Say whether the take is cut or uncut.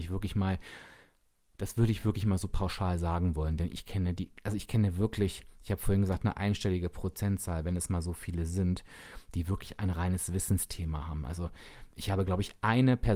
uncut